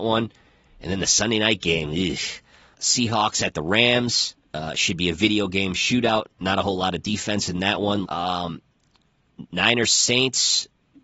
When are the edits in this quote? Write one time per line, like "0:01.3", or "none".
0:02.7
0:08.0

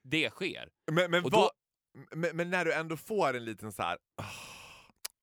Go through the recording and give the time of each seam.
0:04.1

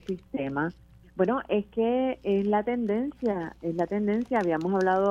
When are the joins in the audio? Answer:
0:01.0

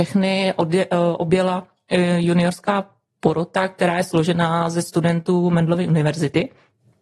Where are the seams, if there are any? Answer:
none

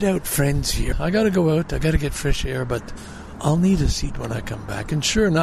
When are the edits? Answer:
0:00.9

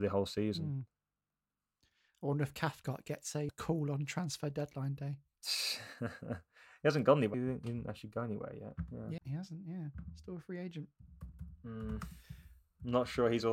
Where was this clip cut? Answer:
0:03.5
0:07.3
0:09.2

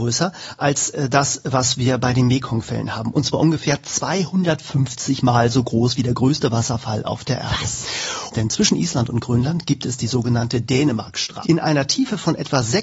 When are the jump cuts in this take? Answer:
0:08.3
0:11.4

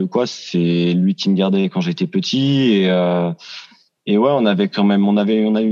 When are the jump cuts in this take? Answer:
none

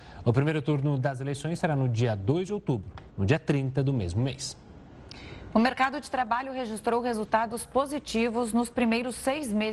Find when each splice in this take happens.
0:03.1

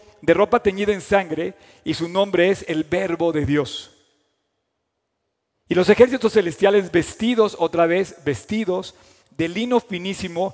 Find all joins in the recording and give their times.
none

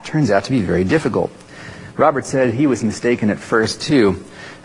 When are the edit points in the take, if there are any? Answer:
0:01.9

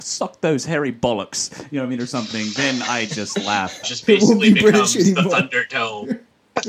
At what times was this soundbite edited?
0:03.8

